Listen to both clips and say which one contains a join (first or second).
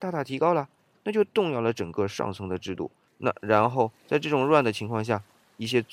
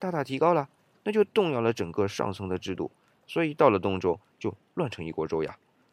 first